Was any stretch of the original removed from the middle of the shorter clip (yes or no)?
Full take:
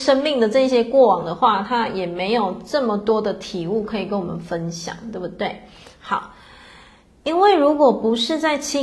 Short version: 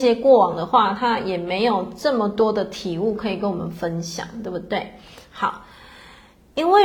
no